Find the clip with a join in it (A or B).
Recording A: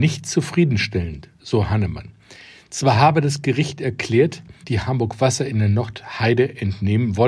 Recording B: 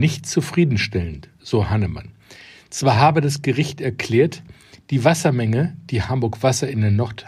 A